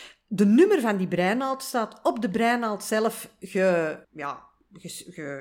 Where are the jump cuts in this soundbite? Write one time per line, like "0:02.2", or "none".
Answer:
0:04.0